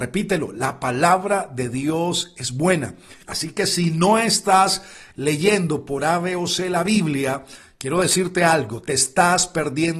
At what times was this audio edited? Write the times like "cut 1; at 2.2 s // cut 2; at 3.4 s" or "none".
cut 1; at 3.2 s